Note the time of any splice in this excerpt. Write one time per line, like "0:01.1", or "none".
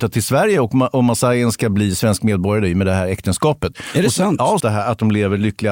0:04.6

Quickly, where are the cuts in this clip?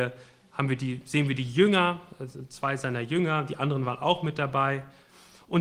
none

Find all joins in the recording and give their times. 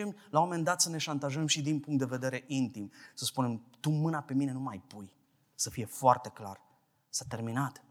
none

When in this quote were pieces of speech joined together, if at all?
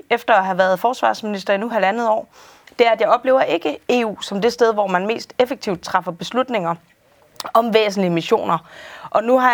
none

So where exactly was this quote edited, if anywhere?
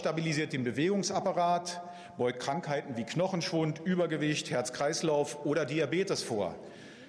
none

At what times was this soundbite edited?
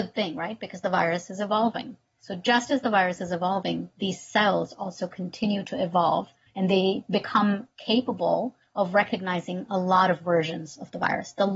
none

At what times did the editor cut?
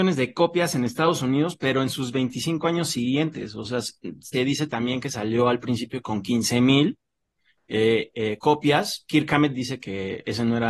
0:04.3

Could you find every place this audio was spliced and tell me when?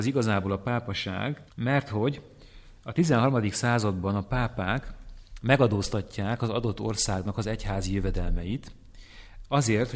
0:01.5

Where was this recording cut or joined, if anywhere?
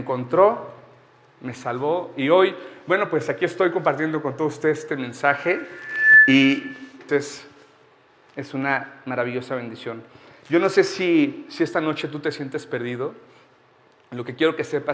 0:07.1

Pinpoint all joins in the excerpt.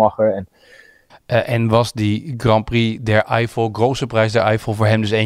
0:01.1

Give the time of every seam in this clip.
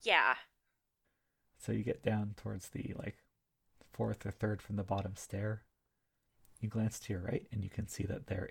none

